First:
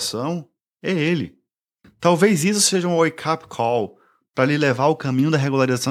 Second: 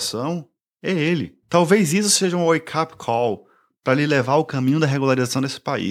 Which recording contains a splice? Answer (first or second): second